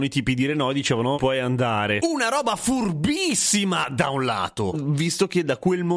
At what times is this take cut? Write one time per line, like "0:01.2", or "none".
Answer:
0:01.1
0:04.7